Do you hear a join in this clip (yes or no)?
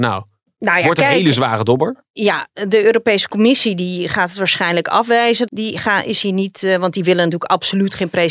yes